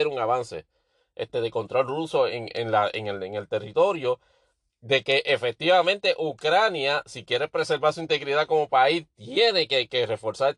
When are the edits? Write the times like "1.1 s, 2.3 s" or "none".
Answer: none